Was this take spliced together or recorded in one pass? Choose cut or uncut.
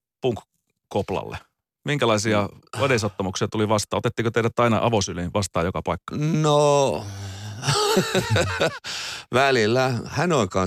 uncut